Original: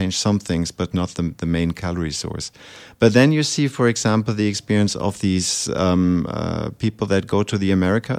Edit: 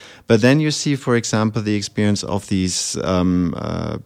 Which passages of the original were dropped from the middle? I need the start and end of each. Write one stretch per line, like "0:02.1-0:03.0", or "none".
none